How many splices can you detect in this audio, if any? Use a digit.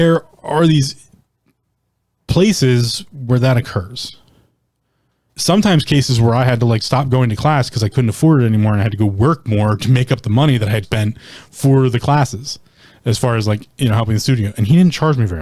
2